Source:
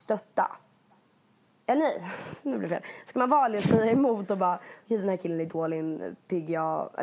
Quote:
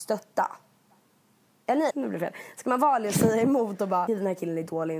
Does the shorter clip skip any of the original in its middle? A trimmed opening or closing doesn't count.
yes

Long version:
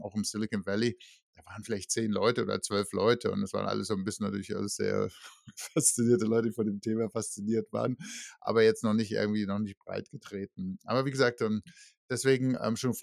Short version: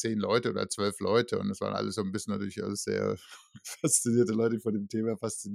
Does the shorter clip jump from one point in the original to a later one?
no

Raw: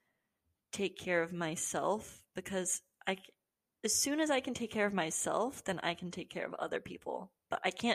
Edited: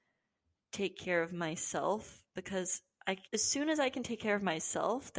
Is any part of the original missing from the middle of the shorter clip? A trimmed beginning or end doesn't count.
yes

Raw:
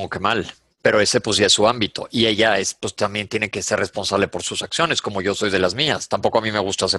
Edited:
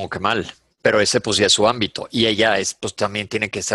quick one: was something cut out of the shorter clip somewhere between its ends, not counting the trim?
no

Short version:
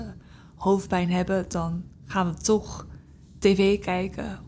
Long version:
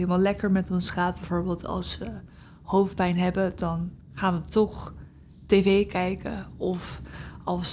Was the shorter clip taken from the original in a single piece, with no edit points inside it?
yes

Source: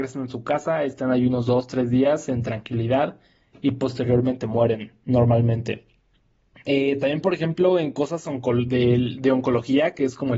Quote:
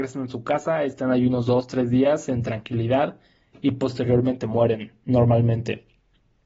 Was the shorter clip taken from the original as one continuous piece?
yes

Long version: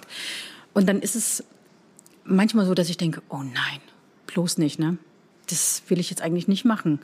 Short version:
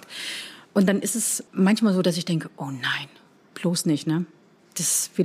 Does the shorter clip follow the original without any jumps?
no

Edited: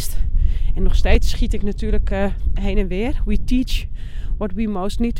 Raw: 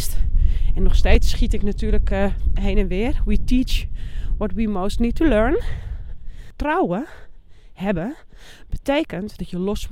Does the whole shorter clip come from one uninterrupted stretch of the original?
yes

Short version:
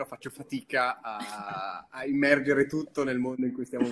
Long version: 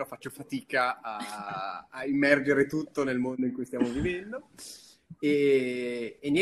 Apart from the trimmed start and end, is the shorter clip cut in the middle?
no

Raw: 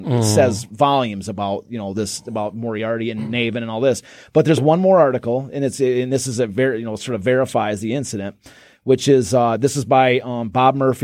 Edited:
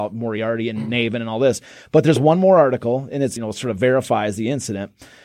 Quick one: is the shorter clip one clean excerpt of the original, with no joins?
no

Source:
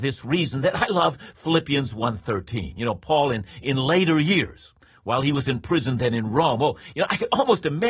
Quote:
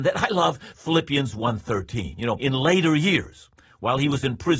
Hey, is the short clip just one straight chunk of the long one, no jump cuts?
no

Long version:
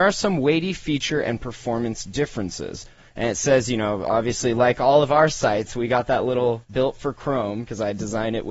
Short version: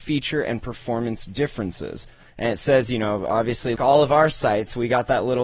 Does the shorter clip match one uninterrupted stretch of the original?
no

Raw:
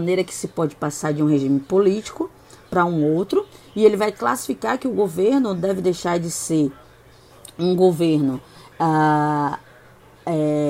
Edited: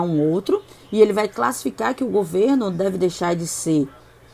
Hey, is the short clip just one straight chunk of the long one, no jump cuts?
yes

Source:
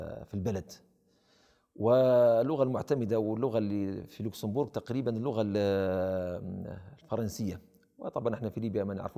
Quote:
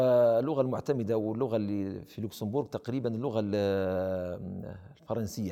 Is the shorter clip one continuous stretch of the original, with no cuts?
yes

